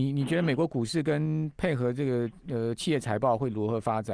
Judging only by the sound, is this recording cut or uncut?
uncut